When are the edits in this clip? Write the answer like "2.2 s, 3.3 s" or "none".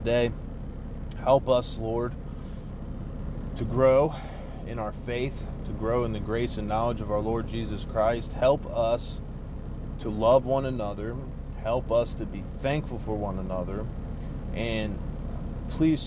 none